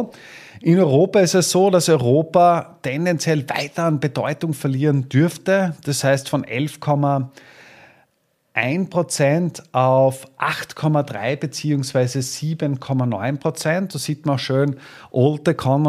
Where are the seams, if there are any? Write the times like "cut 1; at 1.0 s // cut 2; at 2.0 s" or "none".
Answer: none